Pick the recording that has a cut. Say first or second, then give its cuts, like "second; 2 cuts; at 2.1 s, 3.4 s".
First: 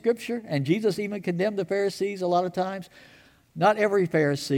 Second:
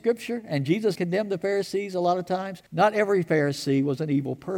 second; 2 cuts; at 1.0 s, 2.7 s